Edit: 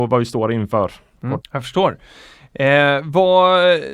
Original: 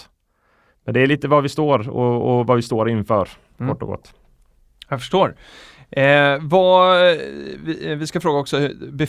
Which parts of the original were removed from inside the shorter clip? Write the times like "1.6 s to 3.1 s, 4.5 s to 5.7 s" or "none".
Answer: 3.8 s to 4.8 s